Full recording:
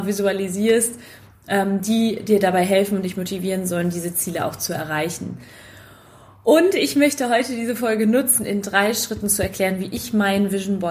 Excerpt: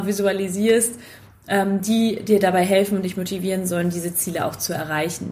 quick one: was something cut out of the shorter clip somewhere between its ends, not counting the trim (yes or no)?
no